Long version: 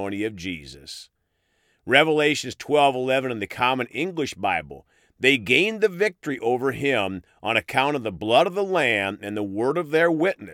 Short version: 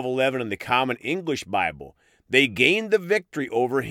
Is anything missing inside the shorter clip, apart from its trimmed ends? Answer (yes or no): no